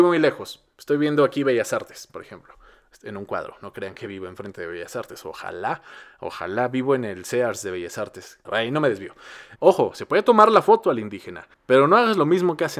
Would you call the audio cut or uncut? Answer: cut